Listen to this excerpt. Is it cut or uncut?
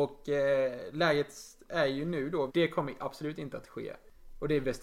cut